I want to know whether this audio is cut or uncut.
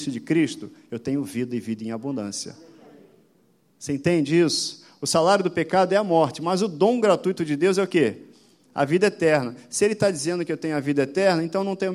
uncut